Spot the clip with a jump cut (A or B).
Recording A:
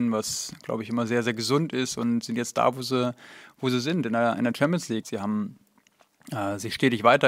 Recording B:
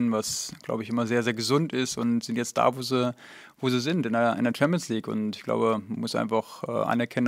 A